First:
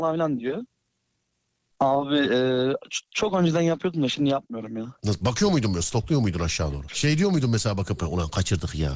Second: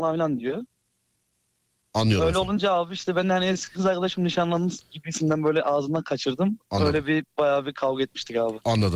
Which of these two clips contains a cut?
first; 2 cuts; at 1.7 s, 6.9 s

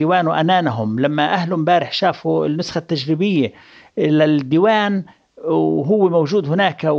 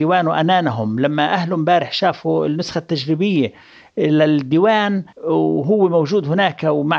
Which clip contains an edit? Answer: second; 1 cut; at 5.1 s

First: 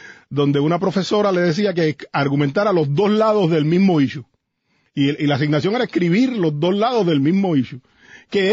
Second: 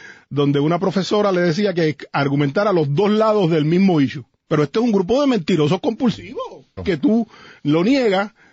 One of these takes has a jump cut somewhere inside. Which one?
second; 2 cuts; at 4.5 s, 6.8 s

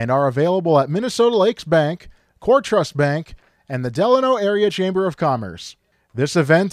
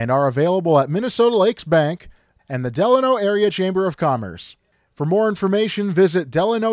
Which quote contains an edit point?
second; 2 cuts; at 2.4 s, 4.9 s

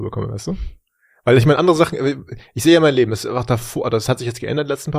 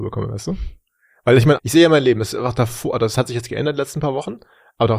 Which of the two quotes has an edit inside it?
second; 1 cut; at 1.6 s

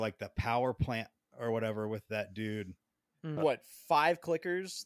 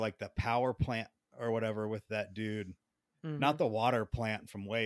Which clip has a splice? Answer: first; 1 cut; at 3.4 s

